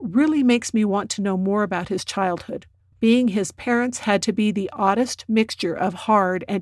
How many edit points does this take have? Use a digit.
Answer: 1